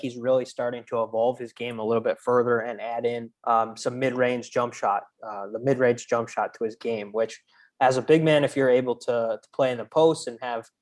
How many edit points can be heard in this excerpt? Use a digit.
1